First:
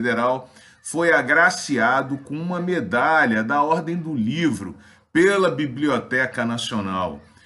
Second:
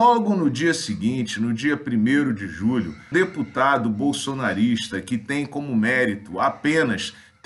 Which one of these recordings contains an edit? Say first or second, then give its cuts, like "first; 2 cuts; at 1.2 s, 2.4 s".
second; 1 cut; at 3.1 s